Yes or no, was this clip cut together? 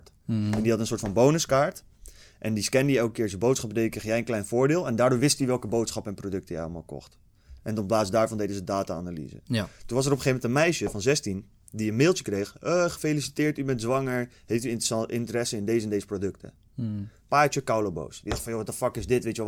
no